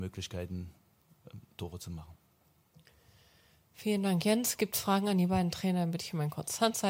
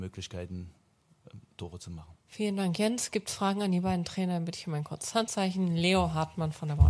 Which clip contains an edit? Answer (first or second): second